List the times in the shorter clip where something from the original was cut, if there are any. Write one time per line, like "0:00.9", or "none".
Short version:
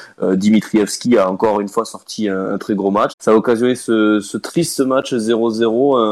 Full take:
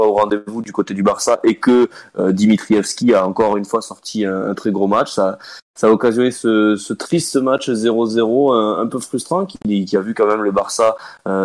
0:03.1